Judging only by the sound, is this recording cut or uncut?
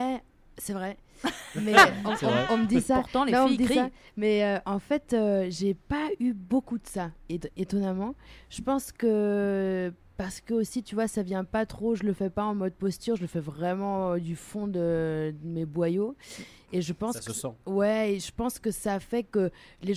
uncut